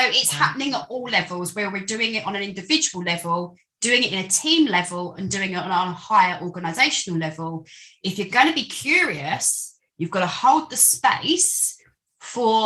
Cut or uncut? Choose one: uncut